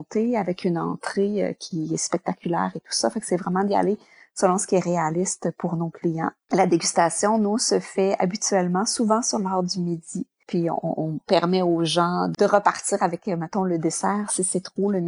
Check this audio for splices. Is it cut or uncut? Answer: uncut